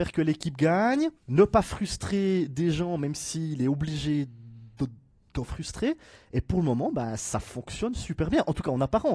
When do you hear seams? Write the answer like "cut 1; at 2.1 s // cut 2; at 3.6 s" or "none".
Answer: cut 1; at 1.2 s